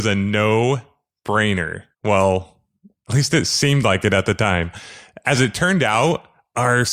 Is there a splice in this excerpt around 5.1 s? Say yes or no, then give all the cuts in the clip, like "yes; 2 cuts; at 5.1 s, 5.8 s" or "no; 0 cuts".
no; 1 cut; at 1.9 s